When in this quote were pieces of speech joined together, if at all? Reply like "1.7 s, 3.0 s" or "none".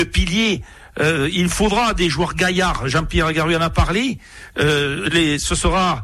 none

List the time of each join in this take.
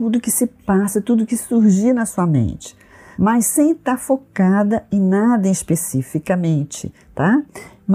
none

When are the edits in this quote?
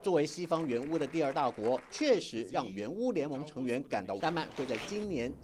1.9 s, 4.2 s

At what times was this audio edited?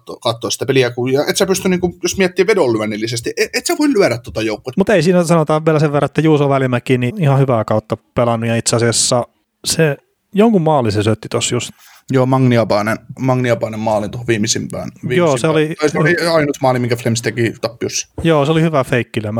4.7 s, 7.1 s

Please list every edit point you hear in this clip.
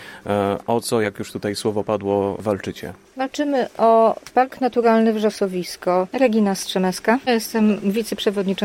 none

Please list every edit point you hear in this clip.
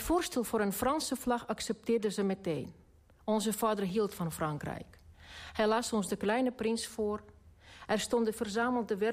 none

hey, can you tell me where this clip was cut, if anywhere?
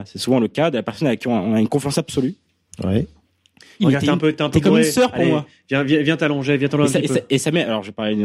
3.8 s

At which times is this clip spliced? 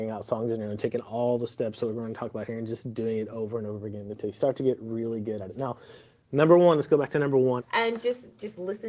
7.6 s

